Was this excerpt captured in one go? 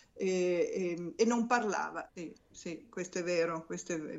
no; 1 cut; at 2.1 s

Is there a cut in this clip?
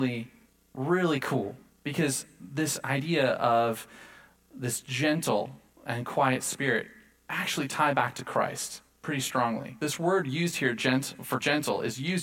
no; 0 cuts

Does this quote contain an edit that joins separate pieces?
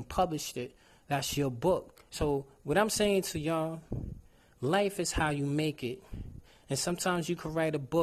yes; 1 cut; at 2.1 s

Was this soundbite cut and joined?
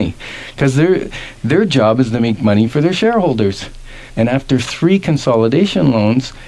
yes; 1 cut; at 4.1 s

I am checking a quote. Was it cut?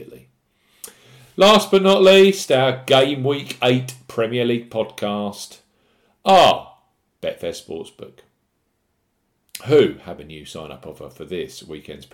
no; 0 cuts

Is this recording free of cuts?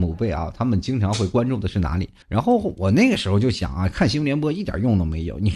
no; 1 cut; at 2.2 s

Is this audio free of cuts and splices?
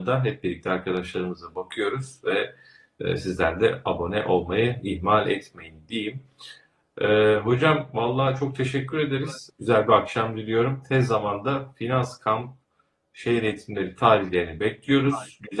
no; 1 cut; at 9.5 s

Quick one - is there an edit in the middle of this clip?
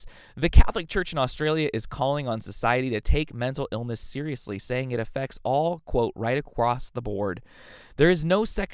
no; 0 cuts

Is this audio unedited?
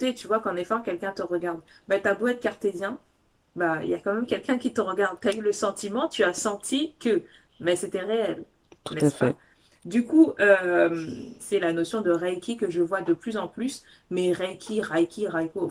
no; 1 cut; at 11.4 s

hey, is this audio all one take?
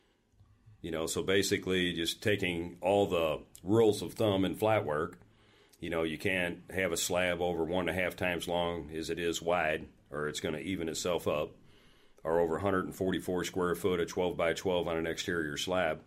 yes; 0 cuts

